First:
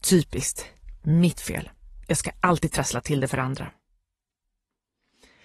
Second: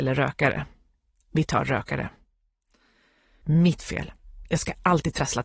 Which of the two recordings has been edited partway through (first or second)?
second